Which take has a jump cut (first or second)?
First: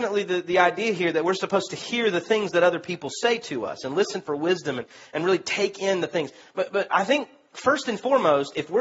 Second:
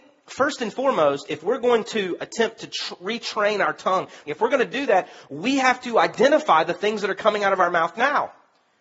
second